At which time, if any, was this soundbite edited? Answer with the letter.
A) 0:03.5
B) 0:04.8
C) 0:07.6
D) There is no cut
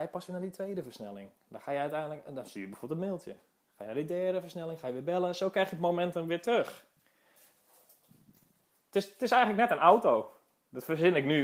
D